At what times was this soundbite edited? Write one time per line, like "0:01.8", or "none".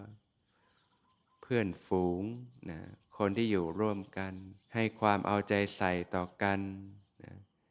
0:04.6